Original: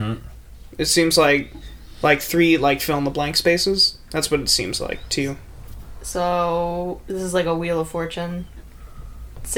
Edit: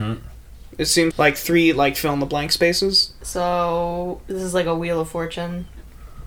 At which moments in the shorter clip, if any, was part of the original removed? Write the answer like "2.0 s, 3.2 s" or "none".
1.1 s, 3.2 s